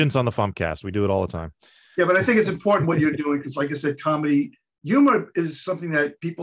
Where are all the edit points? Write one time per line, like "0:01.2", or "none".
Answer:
none